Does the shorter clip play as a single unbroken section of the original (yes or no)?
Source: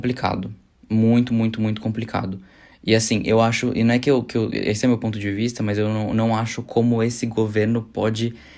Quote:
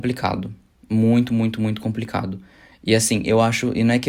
yes